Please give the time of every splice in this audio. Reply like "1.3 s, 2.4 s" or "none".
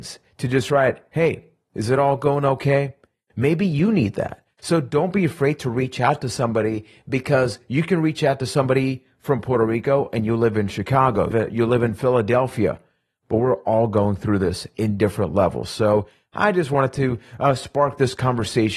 11.3 s